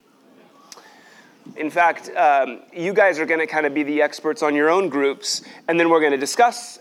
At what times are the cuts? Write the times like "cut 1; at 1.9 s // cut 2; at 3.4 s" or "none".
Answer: cut 1; at 1.6 s